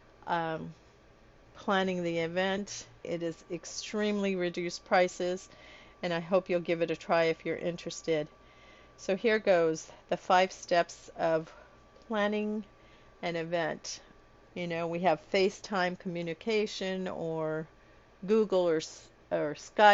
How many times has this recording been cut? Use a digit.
2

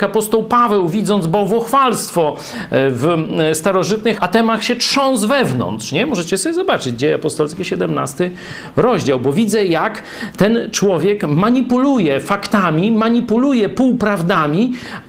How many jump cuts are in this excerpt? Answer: 1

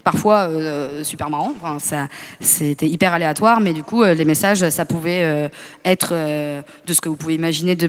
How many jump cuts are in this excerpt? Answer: 1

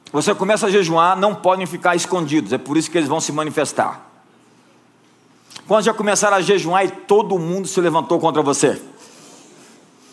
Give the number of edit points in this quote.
0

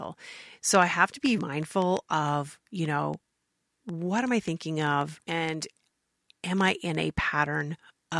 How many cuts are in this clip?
2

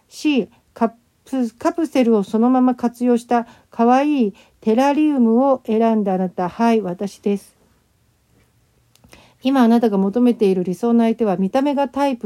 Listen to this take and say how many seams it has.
0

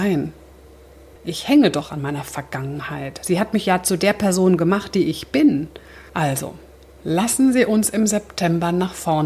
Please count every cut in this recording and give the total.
2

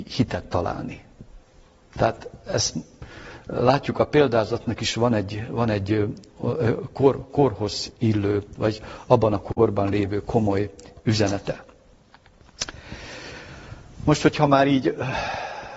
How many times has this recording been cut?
1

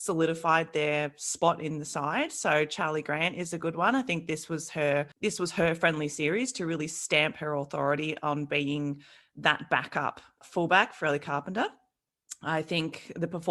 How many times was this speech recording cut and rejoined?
2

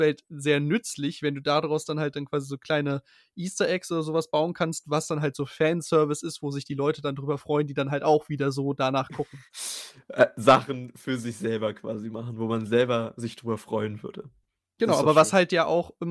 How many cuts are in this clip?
1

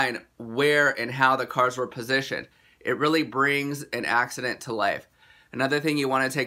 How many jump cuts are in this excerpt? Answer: 0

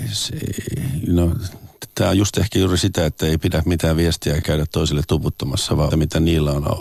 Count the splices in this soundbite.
2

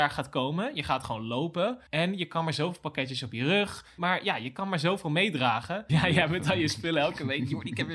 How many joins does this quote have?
3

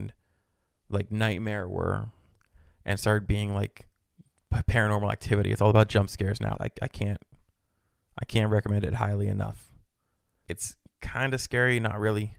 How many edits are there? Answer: 2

